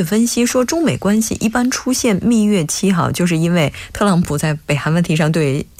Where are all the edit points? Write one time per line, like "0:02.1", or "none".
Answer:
none